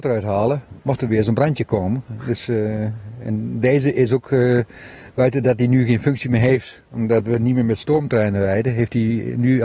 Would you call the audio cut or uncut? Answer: uncut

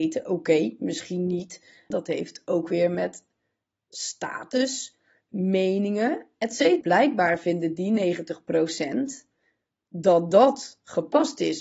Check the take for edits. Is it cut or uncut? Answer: cut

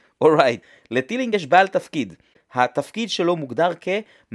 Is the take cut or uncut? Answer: uncut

